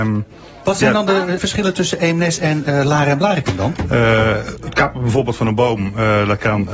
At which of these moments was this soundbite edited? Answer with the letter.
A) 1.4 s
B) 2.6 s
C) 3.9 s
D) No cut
A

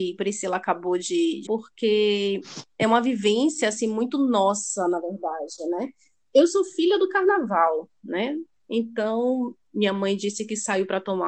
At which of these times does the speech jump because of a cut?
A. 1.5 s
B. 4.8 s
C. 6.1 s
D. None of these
A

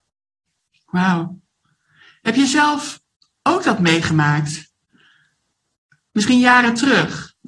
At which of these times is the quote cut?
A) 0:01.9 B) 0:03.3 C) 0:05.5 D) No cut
D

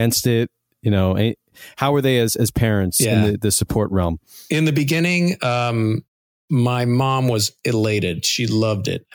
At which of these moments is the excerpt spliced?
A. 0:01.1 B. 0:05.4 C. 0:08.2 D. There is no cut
D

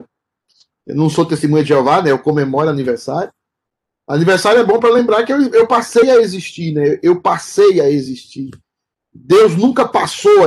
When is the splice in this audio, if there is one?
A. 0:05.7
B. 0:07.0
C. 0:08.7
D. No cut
D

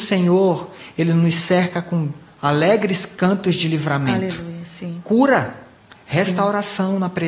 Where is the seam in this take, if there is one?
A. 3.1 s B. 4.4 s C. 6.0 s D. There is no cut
D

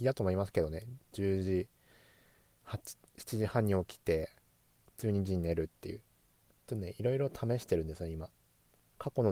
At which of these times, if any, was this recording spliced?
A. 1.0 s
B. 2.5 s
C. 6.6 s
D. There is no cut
C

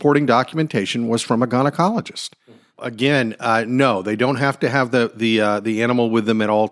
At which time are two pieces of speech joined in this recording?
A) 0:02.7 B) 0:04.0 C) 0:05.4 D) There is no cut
A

